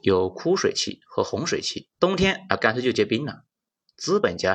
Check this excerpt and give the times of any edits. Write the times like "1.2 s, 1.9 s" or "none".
1.9 s